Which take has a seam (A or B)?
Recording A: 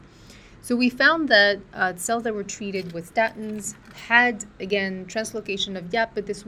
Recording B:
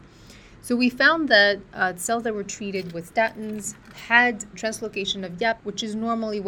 B